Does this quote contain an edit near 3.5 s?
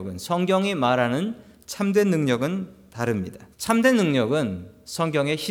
yes; 1 cut; at 3.5 s

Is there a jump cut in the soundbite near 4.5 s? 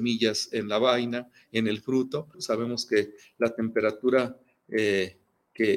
no; 1 cut; at 2.3 s

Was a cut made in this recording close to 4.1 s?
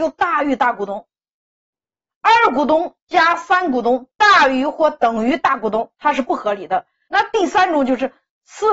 no; 2 cuts; at 2.1 s, 7.1 s

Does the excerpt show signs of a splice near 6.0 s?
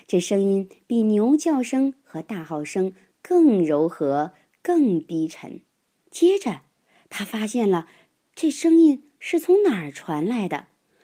yes; 1 cut; at 6.0 s

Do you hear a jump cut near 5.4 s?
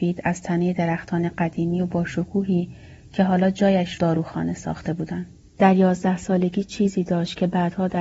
yes; 1 cut; at 5.4 s

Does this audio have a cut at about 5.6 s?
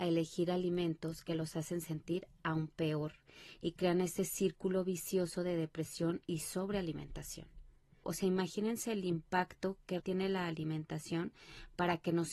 no; 2 cuts; at 8.0 s, 10.0 s

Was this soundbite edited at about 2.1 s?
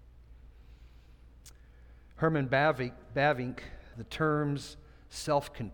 no; 1 cut; at 3.9 s

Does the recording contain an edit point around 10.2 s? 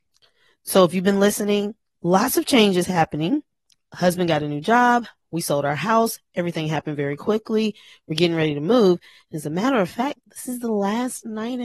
yes; 1 cut; at 10.2 s

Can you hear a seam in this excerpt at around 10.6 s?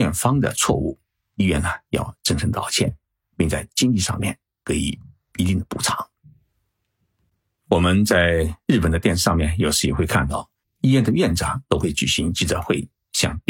yes; 1 cut; at 10.6 s

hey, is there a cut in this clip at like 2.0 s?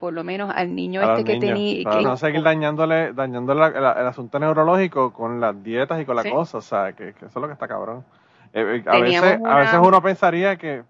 yes; 1 cut; at 2.0 s

